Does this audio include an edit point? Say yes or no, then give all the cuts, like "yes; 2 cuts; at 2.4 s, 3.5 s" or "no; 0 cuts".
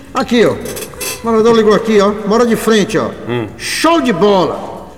no; 0 cuts